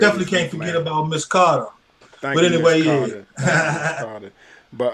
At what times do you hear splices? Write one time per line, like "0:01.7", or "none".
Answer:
0:01.8